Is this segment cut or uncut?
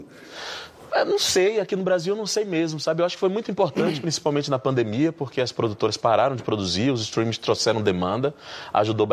uncut